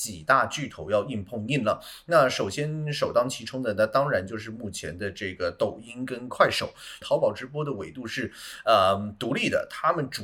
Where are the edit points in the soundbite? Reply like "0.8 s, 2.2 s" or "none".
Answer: 7.0 s